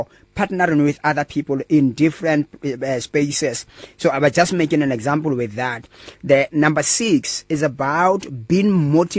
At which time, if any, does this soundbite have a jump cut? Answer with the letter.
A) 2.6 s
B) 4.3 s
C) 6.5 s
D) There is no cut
C